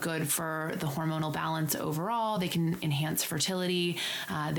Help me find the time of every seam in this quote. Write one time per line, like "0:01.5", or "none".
none